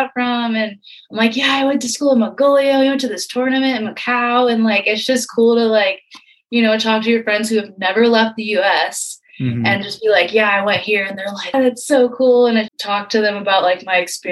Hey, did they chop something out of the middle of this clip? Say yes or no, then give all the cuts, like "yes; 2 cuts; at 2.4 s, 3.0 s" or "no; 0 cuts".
yes; 2 cuts; at 11.5 s, 12.7 s